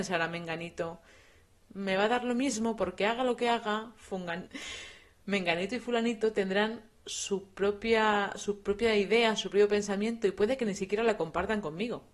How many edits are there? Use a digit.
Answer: 1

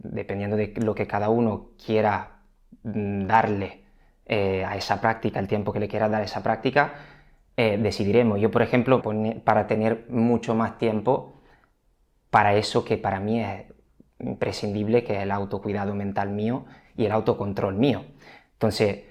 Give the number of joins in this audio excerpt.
1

